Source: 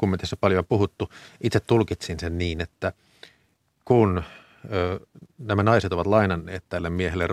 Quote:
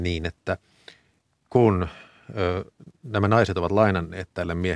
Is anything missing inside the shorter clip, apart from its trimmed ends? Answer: no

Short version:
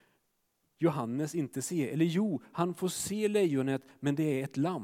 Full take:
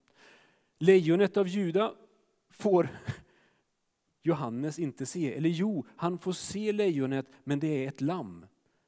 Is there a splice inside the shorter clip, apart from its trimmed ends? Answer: no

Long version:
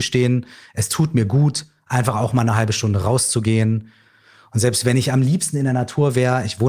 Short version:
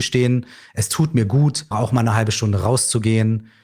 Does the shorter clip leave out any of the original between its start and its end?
yes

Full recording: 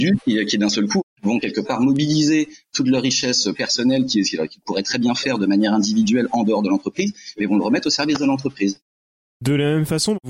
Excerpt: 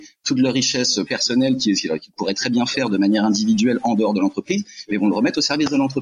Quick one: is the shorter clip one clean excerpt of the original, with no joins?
yes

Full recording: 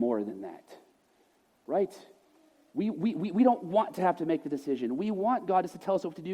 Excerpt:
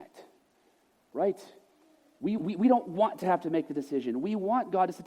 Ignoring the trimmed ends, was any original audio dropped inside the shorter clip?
yes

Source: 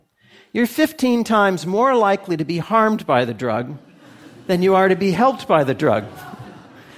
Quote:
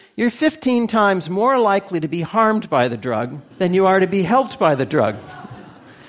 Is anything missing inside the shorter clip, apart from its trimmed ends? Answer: yes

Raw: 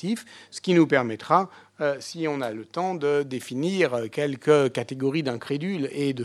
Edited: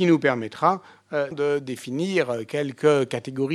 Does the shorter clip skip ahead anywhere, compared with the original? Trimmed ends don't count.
yes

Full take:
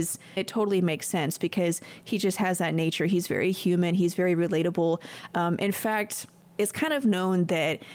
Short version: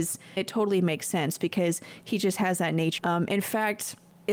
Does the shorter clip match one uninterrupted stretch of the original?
no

